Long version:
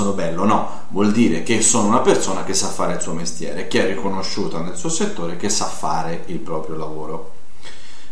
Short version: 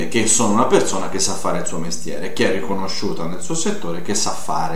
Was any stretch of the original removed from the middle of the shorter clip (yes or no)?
no